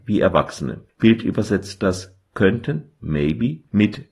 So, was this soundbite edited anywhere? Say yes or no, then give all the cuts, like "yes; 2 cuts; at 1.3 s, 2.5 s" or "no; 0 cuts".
no; 0 cuts